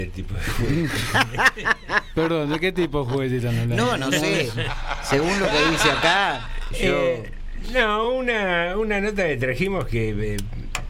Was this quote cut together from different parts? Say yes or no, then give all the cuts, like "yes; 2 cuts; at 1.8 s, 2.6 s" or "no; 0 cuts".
no; 0 cuts